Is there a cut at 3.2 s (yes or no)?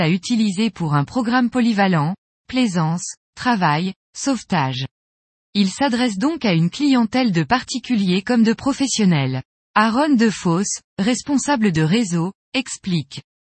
yes